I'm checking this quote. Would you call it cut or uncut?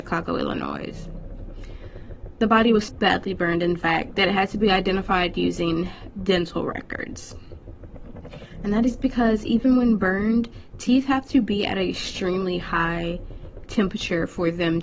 cut